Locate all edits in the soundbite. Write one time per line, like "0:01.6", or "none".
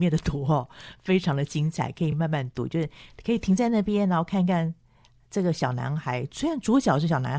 none